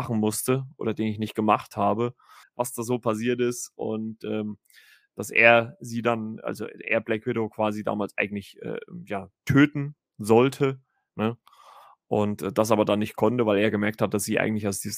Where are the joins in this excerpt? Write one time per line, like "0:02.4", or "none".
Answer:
0:02.4